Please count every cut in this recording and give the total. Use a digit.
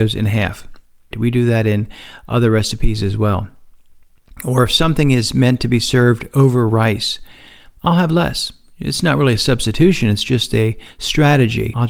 1